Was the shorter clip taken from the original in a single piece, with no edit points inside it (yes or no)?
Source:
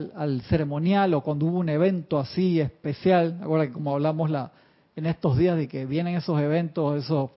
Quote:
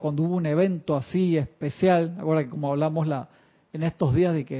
yes